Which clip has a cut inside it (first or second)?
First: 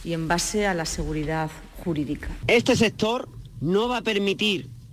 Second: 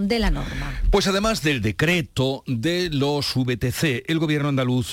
first